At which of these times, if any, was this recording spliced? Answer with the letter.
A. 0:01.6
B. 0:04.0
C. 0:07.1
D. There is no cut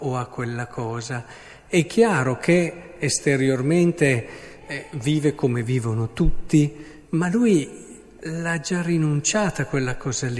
C